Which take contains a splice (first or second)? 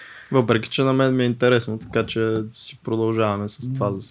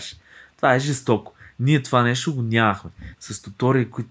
second